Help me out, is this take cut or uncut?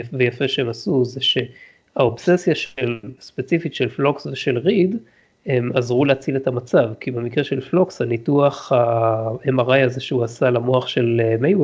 uncut